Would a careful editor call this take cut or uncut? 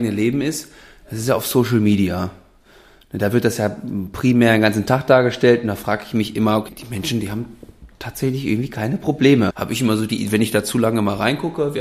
cut